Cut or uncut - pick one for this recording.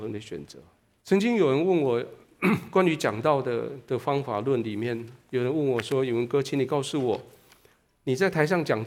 cut